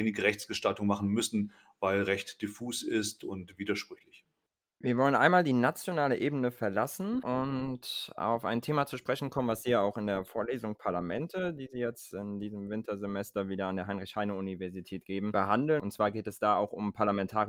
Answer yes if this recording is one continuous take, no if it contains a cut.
yes